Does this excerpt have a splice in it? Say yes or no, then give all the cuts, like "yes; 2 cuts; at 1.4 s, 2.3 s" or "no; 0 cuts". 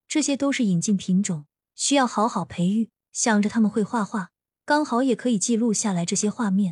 no; 0 cuts